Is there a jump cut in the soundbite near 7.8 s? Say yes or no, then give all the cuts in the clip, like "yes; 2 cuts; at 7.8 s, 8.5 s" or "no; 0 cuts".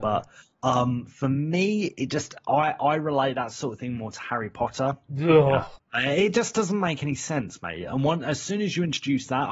no; 1 cut; at 5.1 s